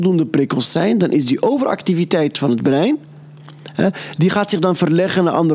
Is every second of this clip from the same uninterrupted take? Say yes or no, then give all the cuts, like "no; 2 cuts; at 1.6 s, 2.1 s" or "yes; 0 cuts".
yes; 0 cuts